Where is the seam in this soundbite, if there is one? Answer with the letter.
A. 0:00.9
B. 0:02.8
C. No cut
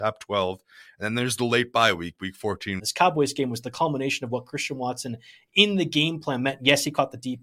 B